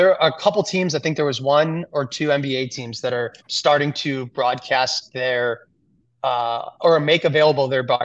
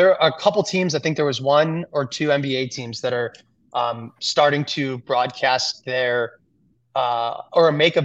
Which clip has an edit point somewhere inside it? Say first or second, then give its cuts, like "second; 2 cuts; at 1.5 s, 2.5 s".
first; 1 cut; at 3.4 s